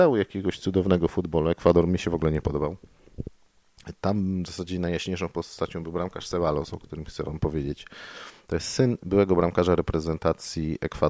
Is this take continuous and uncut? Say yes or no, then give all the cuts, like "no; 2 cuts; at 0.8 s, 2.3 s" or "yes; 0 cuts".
yes; 0 cuts